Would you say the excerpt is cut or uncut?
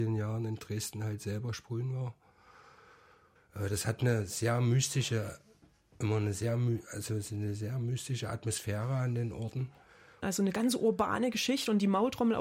cut